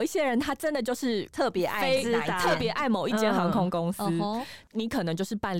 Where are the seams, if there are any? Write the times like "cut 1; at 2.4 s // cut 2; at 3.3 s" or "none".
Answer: none